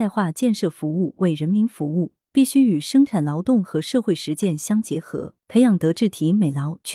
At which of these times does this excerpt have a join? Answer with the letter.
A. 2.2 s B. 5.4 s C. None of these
B